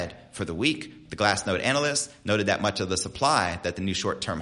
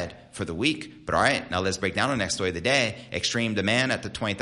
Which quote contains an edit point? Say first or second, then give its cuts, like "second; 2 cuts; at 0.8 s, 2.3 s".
first; 1 cut; at 1.1 s